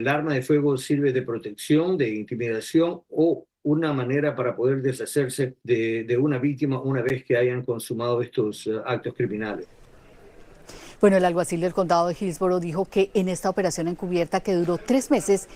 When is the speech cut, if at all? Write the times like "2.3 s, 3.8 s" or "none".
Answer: 5.6 s